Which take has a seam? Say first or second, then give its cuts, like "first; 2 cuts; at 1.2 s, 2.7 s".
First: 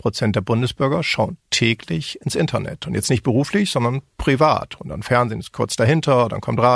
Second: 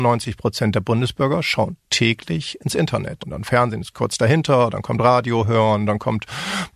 second; 1 cut; at 3.2 s